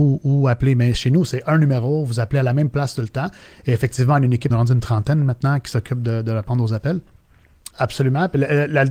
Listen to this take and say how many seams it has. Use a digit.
2